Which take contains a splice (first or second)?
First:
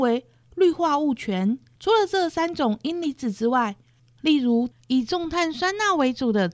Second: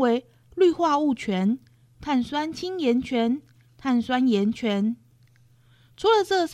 first